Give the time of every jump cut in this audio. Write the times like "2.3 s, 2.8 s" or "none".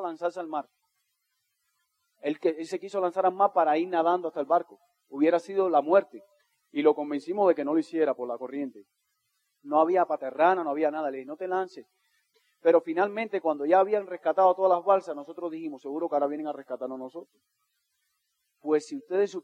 none